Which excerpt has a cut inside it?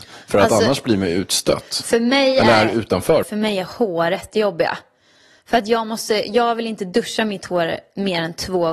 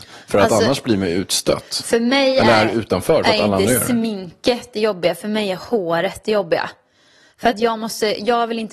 first; 1 cut; at 3.2 s

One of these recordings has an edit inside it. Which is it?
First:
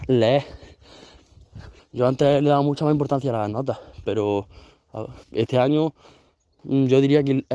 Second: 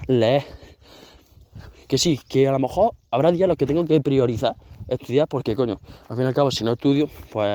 first; 2 cuts; at 1.8 s, 5.2 s

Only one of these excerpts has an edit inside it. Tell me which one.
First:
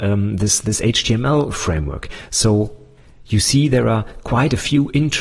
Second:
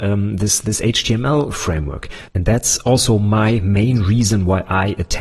second; 1 cut; at 2.3 s

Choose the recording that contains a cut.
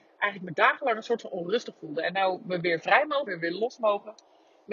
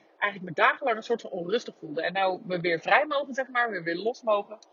first; 1 cut; at 3.3 s

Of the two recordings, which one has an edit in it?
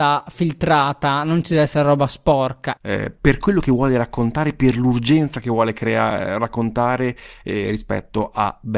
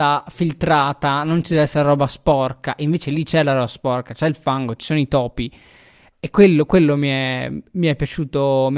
first; 1 cut; at 2.8 s

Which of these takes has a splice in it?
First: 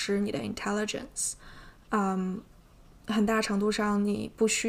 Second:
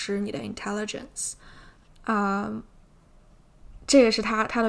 second; 1 cut; at 1.9 s

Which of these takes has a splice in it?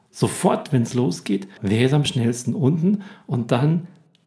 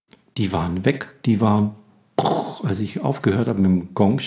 first; 1 cut; at 1.6 s

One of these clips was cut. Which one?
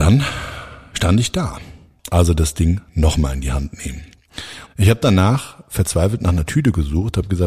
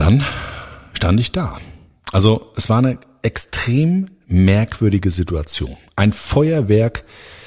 first; 2 cuts; at 2.0 s, 4.7 s

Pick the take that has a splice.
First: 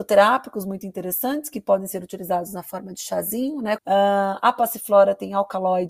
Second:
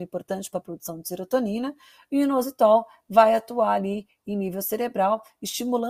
first; 1 cut; at 3.8 s

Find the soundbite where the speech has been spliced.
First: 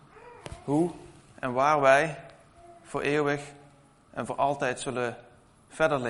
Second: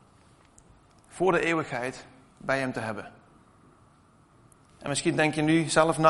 second; 1 cut; at 4.7 s

